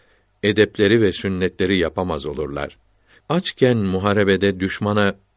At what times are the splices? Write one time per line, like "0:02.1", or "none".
0:03.2